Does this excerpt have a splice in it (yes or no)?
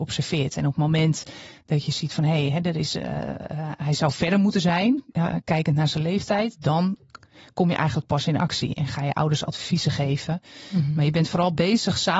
no